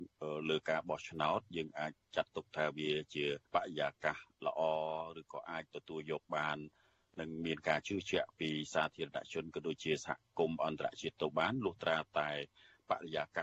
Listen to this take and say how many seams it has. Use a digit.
1